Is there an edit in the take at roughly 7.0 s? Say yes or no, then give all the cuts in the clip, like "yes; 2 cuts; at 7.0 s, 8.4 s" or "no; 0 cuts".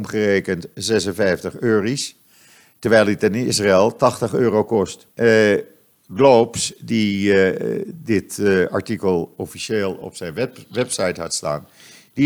no; 1 cut; at 5.1 s